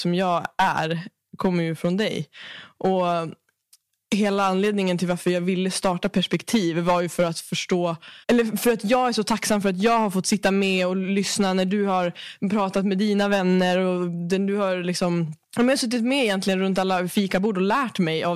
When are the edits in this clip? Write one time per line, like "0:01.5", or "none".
0:08.2
0:15.4